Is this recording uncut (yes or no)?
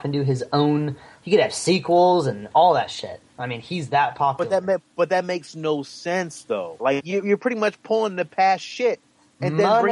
no